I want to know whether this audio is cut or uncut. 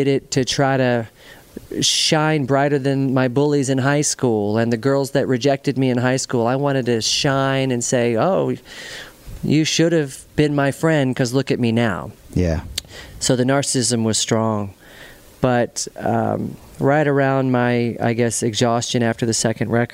uncut